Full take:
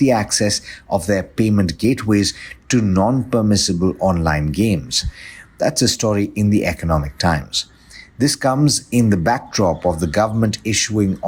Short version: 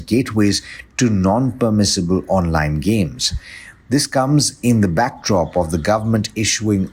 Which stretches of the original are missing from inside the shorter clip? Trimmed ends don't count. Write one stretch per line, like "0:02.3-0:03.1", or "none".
0:05.5-0:08.1